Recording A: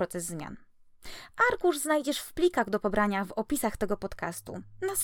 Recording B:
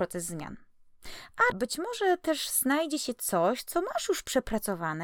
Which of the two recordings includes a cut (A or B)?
B